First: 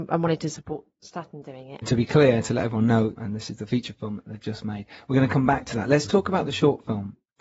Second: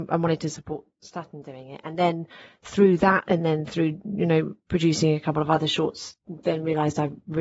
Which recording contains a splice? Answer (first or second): first